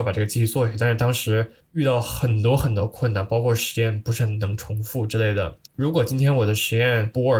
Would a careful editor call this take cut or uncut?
cut